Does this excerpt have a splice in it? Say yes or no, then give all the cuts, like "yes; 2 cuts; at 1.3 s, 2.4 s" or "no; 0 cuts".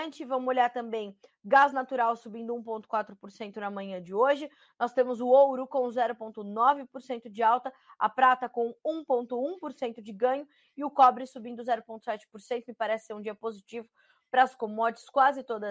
no; 0 cuts